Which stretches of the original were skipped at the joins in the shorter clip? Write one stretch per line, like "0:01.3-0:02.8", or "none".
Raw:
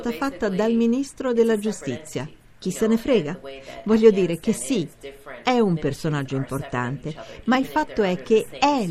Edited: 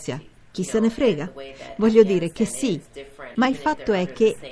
0:05.4-0:07.4